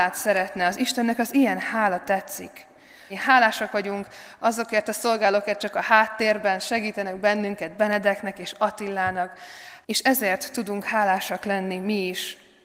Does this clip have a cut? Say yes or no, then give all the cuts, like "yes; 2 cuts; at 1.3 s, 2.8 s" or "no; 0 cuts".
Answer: yes; 3 cuts; at 3.1 s, 5.6 s, 9.8 s